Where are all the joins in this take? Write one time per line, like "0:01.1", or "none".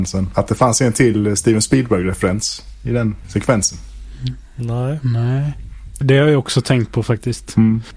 0:06.0